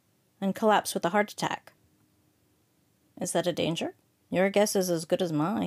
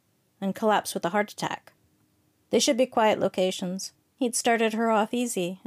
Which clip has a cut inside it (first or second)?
second